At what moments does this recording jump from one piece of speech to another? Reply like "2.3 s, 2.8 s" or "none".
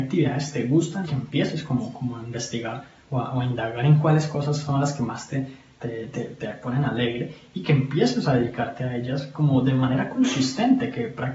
1.0 s, 6.1 s